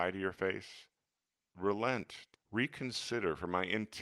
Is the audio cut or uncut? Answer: cut